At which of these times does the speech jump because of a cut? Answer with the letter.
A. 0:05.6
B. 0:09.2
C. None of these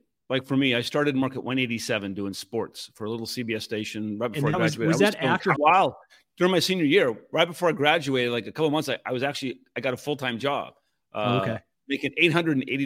A